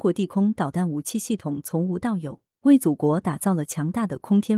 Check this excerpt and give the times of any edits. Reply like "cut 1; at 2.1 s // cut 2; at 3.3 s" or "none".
cut 1; at 2.6 s